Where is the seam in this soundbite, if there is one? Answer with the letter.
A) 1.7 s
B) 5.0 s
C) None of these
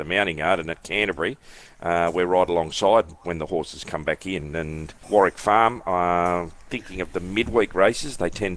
B